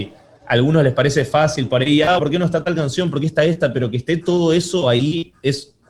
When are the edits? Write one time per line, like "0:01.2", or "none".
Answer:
0:02.2

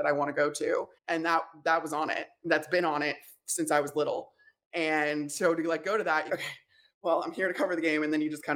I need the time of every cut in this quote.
0:01.0
0:06.3

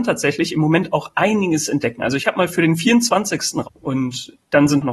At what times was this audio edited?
0:03.6

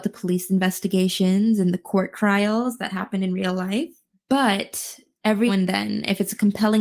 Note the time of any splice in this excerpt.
0:04.1
0:05.5

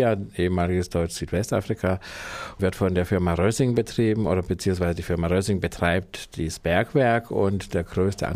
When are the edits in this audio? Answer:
0:02.6

